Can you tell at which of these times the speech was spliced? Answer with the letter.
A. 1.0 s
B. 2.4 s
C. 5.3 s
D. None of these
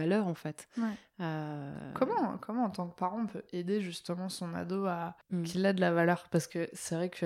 C